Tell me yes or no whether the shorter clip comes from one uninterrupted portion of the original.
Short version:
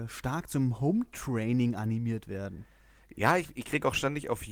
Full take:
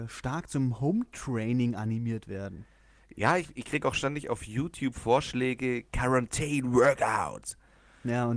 yes